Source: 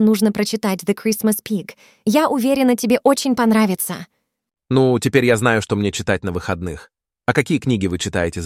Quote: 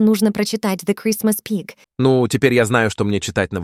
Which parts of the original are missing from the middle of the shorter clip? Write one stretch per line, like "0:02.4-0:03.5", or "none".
0:01.8-0:04.6